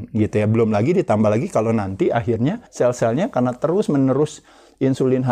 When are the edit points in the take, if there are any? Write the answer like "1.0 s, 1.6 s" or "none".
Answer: 2.7 s